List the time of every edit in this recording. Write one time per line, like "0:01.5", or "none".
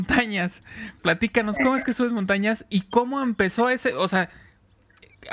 0:01.0